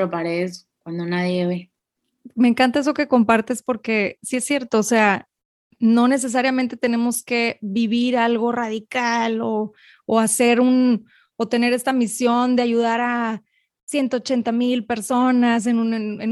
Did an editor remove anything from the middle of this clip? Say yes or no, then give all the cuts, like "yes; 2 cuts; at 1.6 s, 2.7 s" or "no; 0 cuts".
no; 0 cuts